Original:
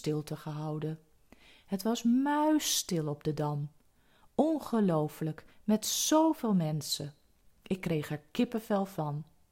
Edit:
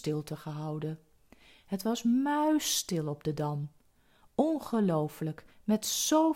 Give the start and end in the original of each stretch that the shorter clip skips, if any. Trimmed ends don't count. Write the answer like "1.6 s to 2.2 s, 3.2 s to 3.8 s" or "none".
none